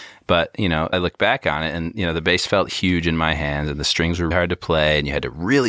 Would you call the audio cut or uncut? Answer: cut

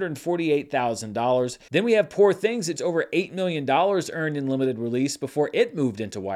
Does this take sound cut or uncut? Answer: cut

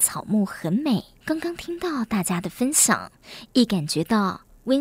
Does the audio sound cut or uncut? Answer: cut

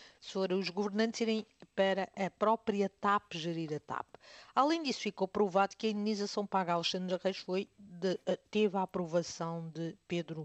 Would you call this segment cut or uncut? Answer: uncut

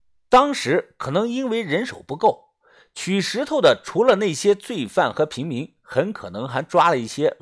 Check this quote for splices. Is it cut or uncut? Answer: uncut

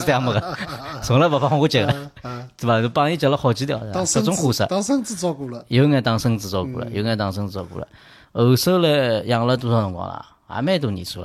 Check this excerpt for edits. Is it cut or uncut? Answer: uncut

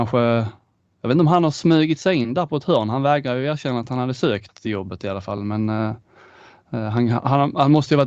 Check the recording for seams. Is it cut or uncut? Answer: uncut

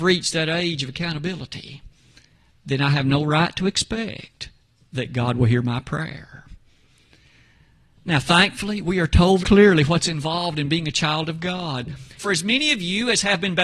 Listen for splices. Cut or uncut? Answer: cut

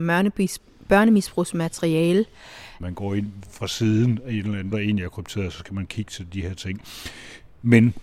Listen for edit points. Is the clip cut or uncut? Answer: cut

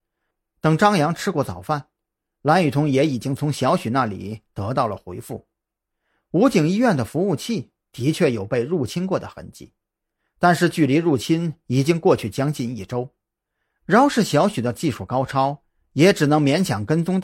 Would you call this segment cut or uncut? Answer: uncut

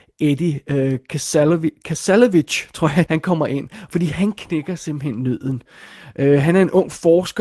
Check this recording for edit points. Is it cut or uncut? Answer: cut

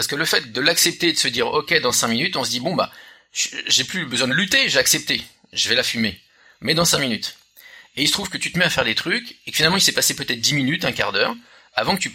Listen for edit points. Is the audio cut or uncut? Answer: uncut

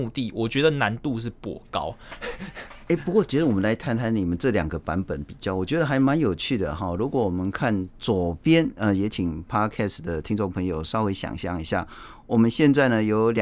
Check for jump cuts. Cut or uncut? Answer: uncut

